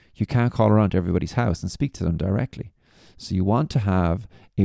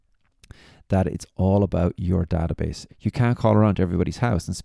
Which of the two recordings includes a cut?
second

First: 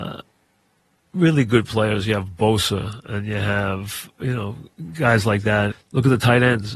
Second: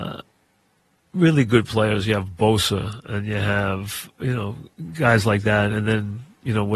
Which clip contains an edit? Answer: first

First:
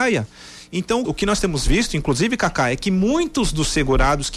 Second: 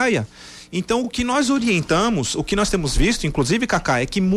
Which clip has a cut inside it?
first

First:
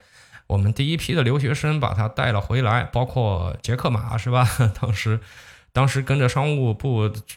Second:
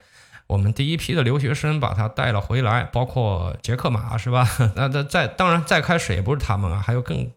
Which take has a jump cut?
second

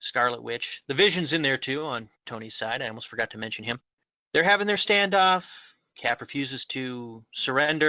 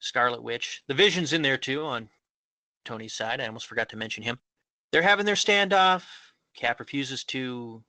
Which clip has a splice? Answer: first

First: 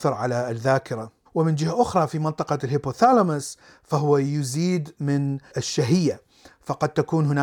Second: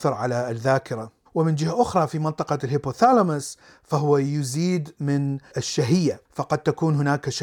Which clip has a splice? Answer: second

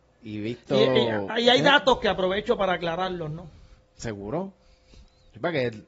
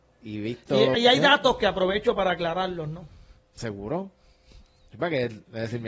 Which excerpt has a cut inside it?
second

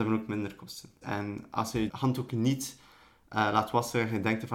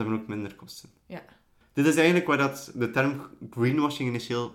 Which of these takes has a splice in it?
first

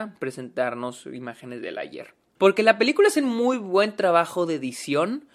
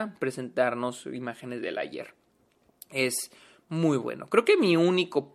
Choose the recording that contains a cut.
first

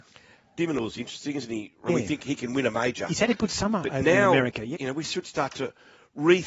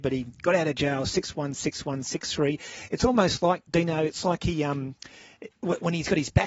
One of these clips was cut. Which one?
first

